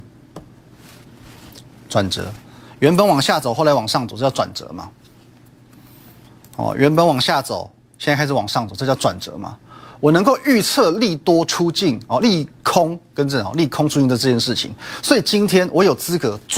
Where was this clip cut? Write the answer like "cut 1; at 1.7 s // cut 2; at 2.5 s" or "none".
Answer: none

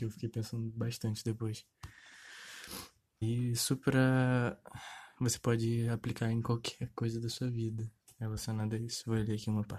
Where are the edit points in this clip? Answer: cut 1; at 3.2 s

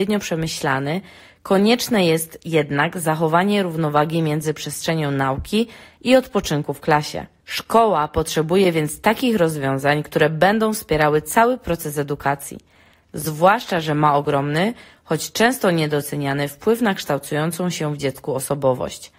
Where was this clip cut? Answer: cut 1; at 13.0 s

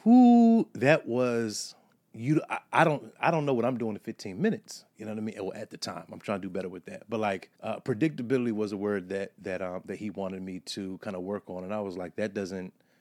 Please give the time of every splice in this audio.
cut 1; at 7.5 s

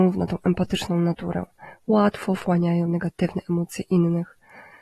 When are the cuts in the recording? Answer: none

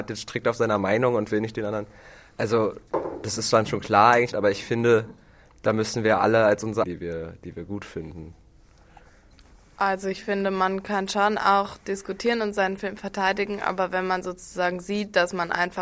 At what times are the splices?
cut 1; at 4.3 s // cut 2; at 6.8 s

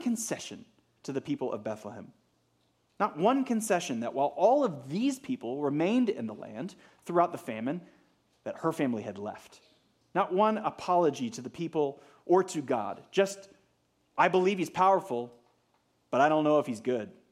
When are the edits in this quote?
cut 1; at 10.0 s

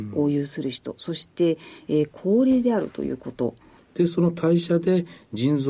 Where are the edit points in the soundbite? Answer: cut 1; at 3.8 s

